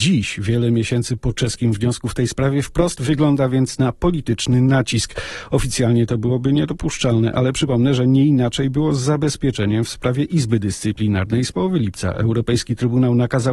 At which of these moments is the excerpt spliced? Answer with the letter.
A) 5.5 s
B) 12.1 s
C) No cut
C